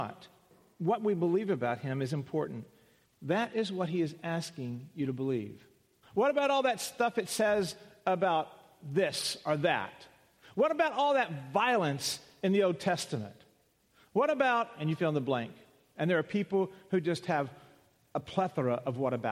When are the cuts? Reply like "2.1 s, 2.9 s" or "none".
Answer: 3.0 s, 6.0 s